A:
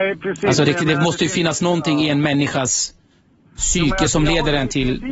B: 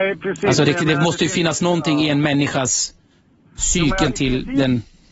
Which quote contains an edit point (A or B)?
B